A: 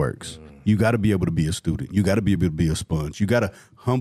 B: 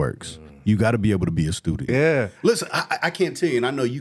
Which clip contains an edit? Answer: B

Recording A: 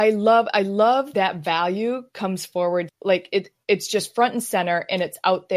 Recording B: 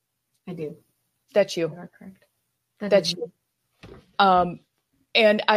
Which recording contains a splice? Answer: A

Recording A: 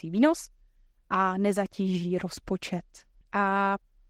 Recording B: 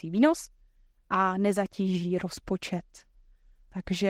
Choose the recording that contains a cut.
A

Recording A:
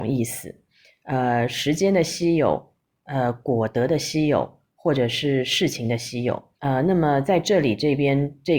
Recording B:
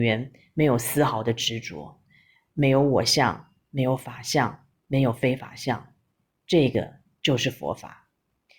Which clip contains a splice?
A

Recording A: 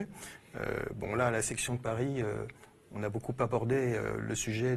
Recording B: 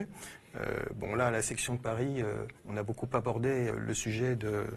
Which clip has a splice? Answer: B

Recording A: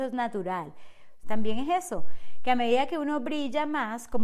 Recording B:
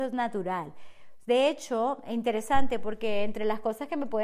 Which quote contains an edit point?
A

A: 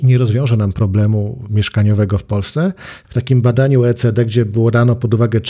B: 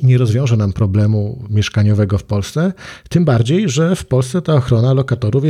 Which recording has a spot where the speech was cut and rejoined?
A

